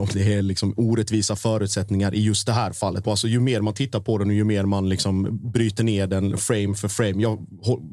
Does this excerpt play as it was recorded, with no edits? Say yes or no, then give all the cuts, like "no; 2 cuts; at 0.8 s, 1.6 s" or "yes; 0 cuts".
no; 1 cut; at 3.0 s